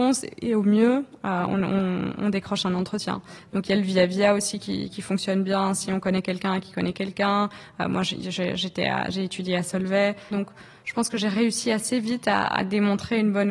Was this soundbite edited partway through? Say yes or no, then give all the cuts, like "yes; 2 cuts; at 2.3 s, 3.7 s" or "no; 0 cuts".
yes; 1 cut; at 10.3 s